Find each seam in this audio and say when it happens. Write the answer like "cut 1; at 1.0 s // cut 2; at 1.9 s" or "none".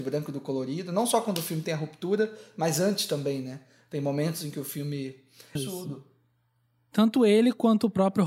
cut 1; at 5.6 s